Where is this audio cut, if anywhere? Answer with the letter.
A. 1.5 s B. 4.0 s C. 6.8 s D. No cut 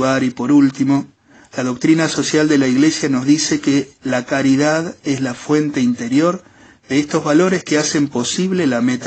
D